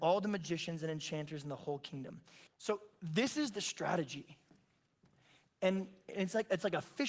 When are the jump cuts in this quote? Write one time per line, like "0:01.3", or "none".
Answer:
0:02.5